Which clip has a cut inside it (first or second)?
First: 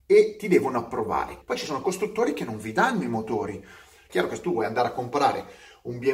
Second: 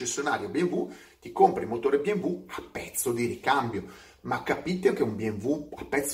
first